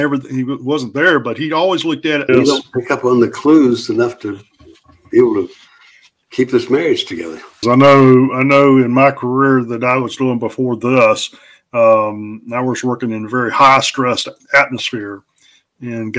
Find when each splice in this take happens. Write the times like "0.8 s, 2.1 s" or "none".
2.3 s, 7.6 s